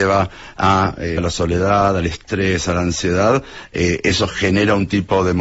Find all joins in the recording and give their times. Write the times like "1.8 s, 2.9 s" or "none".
1.2 s